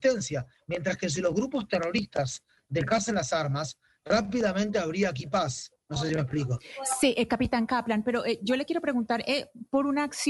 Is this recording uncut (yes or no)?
no